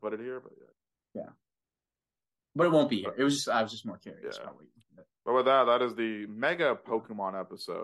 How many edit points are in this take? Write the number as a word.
zero